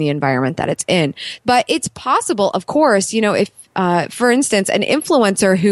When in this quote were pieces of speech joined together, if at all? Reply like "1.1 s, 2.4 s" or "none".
1.4 s